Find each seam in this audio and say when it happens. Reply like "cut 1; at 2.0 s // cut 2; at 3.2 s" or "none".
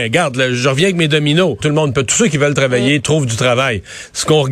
cut 1; at 1.6 s

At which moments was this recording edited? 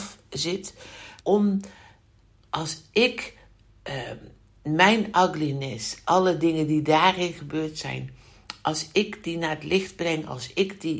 cut 1; at 1.2 s

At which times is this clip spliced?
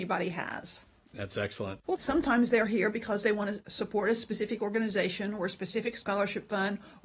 cut 1; at 1.8 s

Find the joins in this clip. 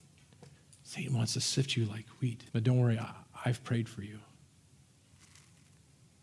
cut 1; at 2.5 s

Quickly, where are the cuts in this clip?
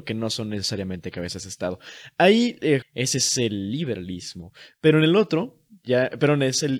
cut 1; at 2.8 s

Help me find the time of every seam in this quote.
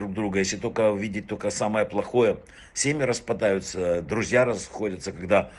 none

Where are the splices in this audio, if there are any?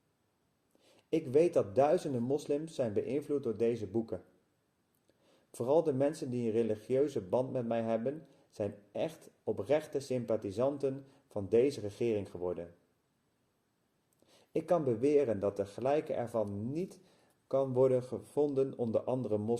none

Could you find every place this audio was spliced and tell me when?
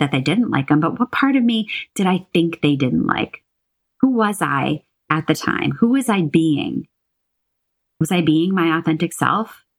none

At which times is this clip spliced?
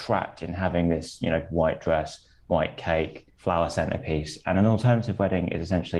cut 1; at 3.3 s

